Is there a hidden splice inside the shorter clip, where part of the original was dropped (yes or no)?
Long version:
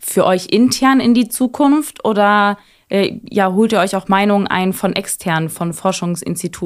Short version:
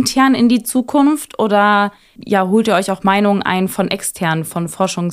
yes